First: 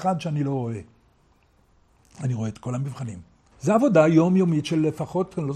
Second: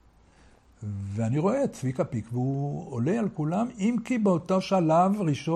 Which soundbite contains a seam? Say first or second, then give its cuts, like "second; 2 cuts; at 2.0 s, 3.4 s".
first; 1 cut; at 3.5 s